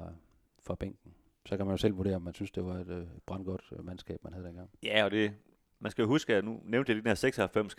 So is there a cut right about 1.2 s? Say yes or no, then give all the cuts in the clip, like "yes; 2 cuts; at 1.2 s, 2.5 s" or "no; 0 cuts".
no; 0 cuts